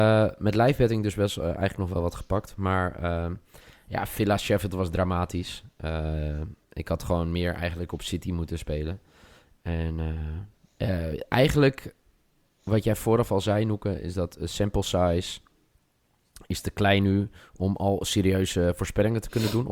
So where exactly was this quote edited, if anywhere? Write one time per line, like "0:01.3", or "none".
none